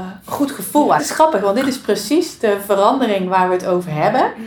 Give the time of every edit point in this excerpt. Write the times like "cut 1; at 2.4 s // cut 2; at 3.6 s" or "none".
cut 1; at 1.0 s

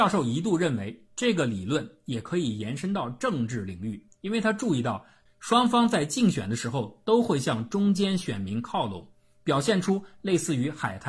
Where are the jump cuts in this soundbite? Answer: cut 1; at 5.3 s

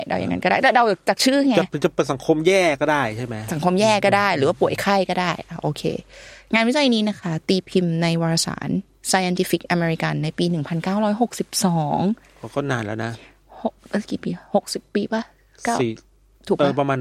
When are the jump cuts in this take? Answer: none

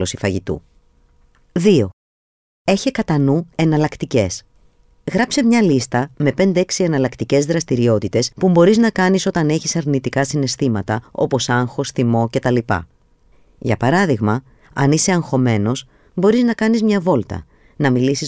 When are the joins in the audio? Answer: cut 1; at 8.3 s

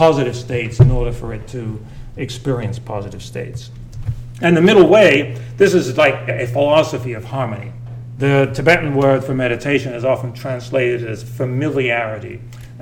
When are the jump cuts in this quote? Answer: cut 1; at 6.3 s // cut 2; at 8.2 s

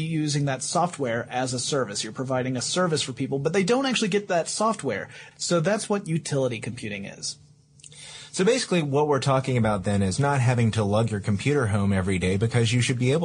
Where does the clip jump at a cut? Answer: cut 1; at 5.3 s

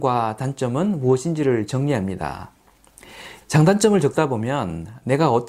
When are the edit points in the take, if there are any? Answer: cut 1; at 3.4 s

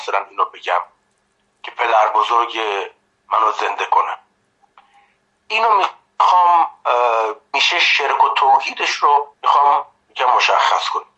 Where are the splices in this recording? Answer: cut 1; at 7.5 s // cut 2; at 9.3 s

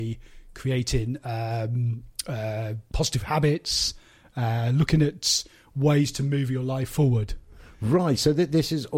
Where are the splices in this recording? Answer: none

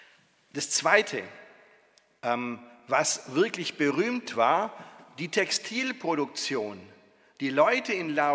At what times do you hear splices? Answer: none

